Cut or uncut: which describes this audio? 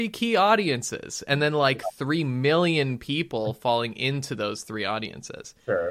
uncut